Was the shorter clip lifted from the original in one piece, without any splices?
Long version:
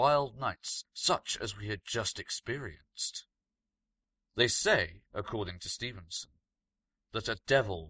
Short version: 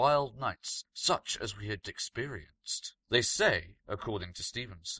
no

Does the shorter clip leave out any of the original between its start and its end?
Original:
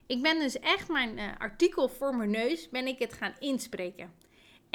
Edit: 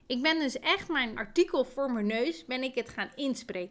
yes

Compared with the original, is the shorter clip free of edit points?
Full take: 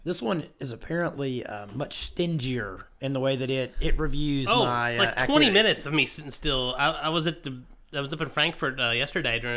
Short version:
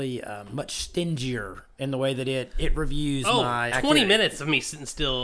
no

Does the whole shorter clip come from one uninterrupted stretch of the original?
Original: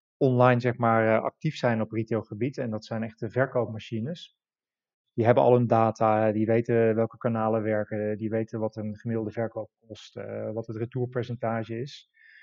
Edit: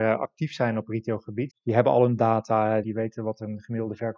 no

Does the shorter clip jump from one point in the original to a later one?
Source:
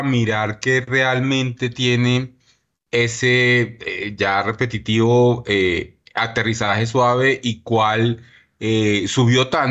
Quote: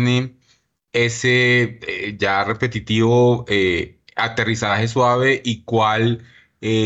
no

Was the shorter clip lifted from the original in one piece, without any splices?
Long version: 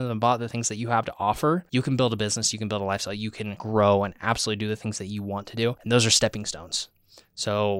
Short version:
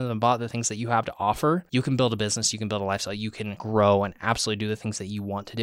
yes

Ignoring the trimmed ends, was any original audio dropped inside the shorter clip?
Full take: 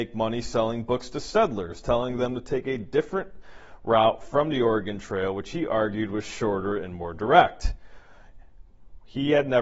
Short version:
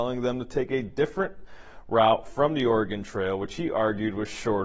no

